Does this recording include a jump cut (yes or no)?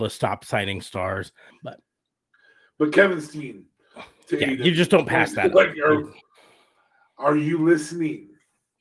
yes